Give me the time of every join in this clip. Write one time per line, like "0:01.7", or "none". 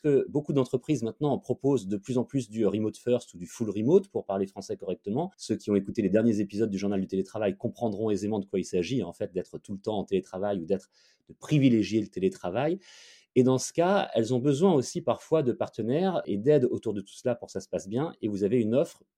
0:05.3